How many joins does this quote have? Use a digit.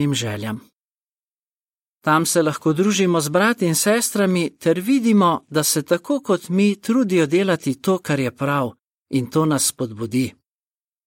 1